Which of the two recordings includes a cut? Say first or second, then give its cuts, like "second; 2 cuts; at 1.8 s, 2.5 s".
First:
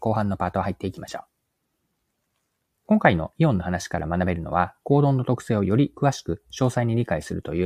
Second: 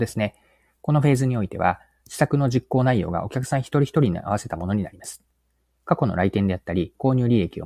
first; 1 cut; at 4.8 s